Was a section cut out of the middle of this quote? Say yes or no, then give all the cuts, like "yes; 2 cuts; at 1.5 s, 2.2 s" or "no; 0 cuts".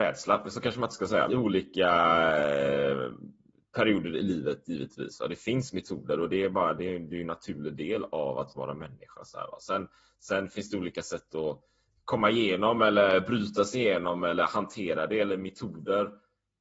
yes; 1 cut; at 1.3 s